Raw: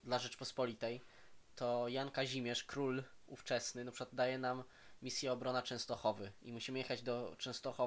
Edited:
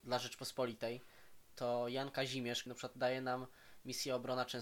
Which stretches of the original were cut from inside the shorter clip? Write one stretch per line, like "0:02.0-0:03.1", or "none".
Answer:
0:02.7-0:03.8

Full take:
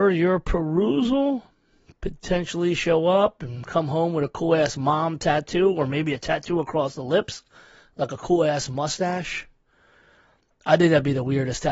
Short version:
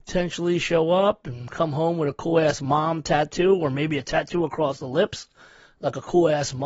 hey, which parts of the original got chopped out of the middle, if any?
none

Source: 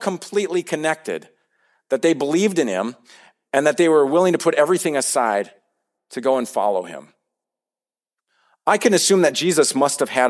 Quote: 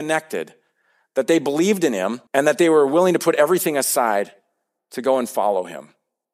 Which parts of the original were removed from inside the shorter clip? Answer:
0:03.0-0:03.5

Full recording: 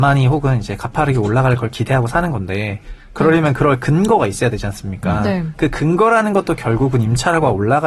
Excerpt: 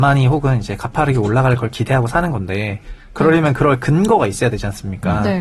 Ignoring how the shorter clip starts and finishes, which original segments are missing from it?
none

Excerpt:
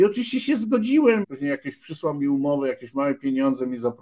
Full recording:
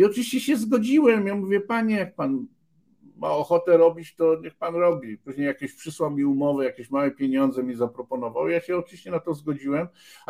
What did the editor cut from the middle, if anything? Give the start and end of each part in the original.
0:01.2-0:05.2

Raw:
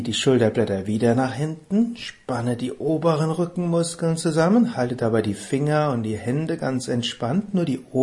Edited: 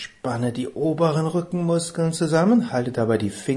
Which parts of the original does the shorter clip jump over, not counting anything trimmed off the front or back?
none

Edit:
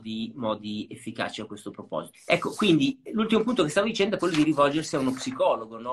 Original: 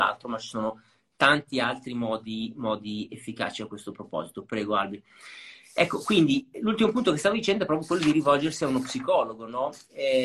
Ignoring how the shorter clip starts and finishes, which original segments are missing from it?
0:04.3-0:05.6
0:07.7-0:07.9

